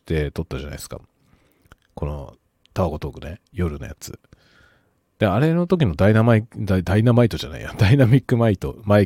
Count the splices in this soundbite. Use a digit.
0